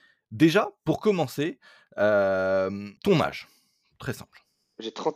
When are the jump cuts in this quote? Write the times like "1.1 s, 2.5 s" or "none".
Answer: 3.0 s